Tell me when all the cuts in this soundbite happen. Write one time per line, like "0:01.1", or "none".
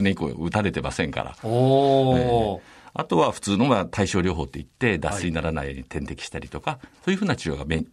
none